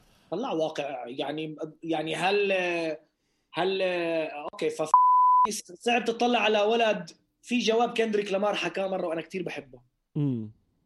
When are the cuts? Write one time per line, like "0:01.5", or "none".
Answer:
0:05.6